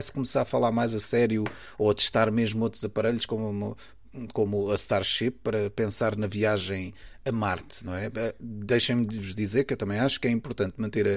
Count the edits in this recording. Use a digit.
0